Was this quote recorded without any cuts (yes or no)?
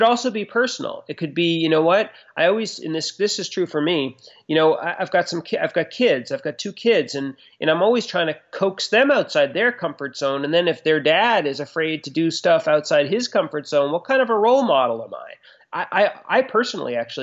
yes